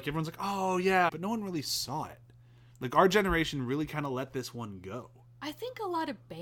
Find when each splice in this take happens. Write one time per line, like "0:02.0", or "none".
0:01.1